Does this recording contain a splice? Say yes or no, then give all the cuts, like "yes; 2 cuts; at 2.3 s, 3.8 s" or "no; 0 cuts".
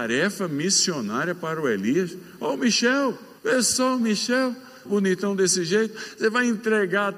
yes; 2 cuts; at 3.4 s, 4.9 s